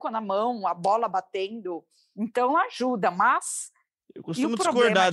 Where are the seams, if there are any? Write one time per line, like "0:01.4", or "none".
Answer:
none